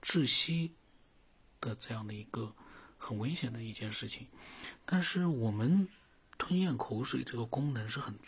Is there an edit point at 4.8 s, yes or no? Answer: yes